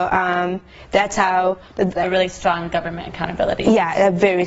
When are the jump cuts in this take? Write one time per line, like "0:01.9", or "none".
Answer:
0:02.0